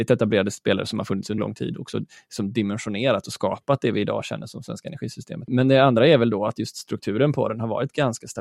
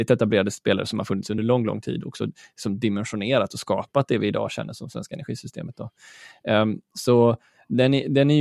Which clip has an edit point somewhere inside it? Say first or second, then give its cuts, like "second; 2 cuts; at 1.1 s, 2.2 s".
first; 2 cuts; at 1.4 s, 5.5 s